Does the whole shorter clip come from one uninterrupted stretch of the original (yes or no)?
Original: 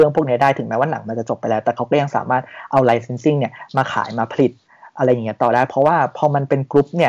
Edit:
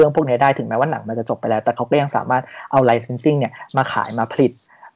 yes